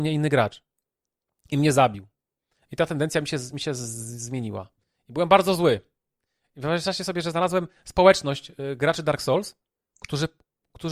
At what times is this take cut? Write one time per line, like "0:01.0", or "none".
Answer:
none